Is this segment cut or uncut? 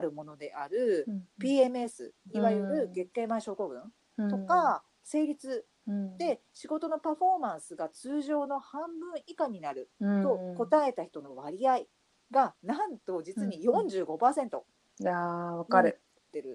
uncut